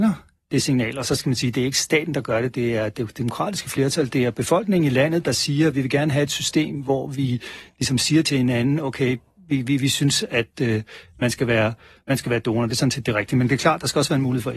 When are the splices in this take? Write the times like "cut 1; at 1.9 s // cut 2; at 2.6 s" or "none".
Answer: none